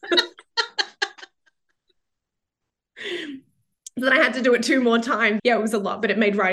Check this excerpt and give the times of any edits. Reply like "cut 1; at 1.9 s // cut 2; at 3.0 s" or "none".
cut 1; at 5.4 s